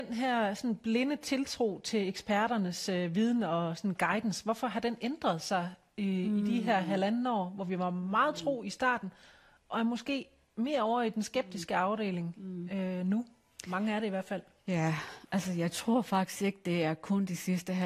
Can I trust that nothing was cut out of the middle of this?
yes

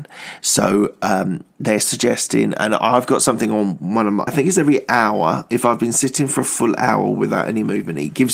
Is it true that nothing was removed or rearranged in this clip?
no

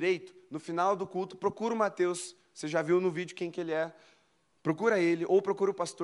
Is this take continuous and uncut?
yes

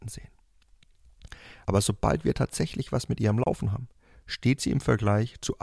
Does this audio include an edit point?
no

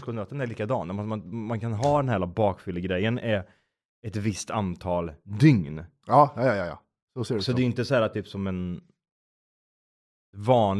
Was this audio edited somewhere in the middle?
no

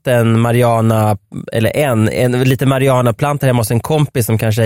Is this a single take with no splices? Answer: yes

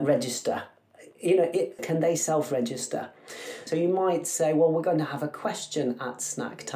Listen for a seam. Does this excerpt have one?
yes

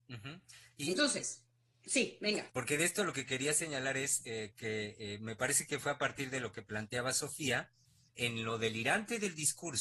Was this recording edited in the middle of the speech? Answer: yes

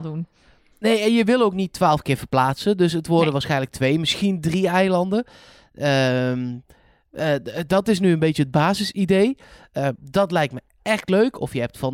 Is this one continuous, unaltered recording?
no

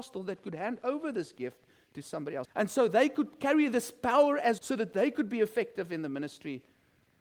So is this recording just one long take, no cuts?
no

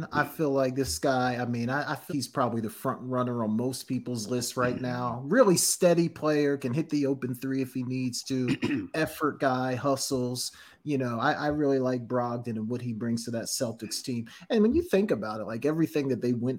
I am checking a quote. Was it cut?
yes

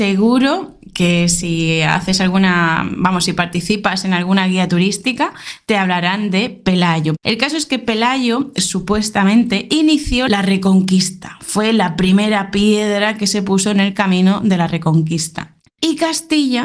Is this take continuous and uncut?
no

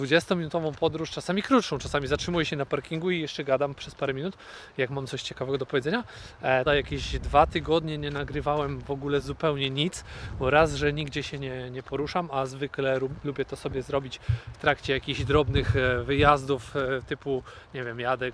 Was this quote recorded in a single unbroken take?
no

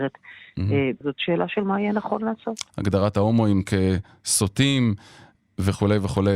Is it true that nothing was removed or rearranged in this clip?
no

